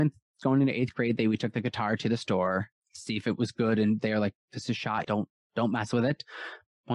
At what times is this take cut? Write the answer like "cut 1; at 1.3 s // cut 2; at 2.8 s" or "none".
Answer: cut 1; at 5.0 s